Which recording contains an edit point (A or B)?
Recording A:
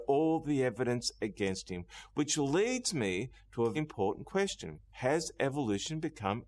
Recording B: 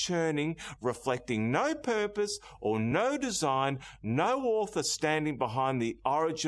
A